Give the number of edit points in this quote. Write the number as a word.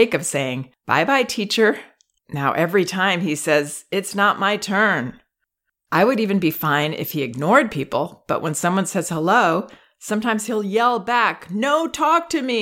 one